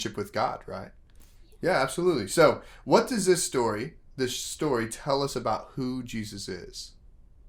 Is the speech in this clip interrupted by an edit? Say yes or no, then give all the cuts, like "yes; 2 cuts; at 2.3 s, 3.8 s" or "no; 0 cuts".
no; 0 cuts